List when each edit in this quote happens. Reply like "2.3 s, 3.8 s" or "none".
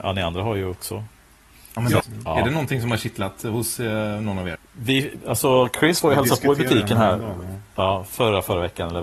2.0 s, 4.6 s